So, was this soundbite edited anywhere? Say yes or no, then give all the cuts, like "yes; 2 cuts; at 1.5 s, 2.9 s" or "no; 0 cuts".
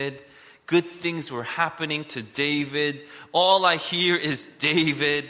no; 0 cuts